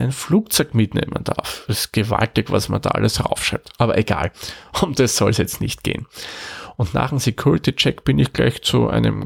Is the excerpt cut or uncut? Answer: uncut